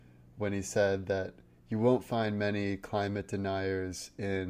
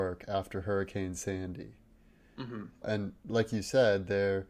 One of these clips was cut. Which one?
second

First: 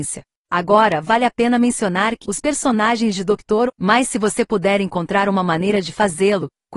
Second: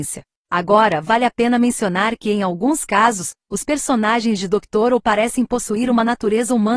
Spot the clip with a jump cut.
first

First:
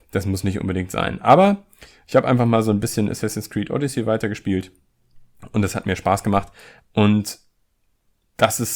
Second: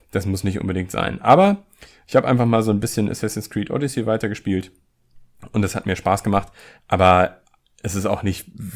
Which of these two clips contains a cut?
first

